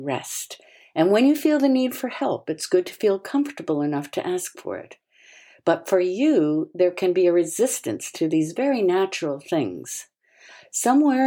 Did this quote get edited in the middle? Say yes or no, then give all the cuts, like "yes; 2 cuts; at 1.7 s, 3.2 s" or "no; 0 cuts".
no; 0 cuts